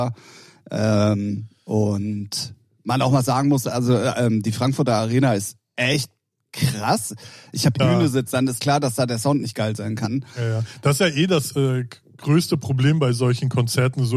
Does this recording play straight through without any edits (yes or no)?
no